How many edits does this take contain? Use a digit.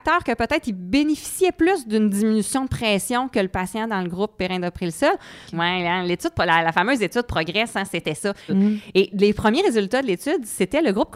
2